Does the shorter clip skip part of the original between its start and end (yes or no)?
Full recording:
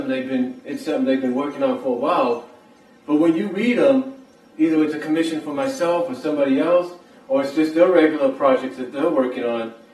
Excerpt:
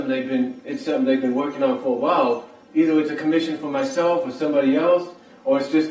yes